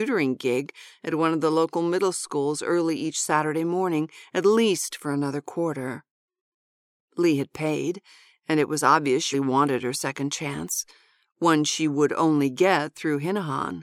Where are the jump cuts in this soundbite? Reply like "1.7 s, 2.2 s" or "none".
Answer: 7.0 s, 9.3 s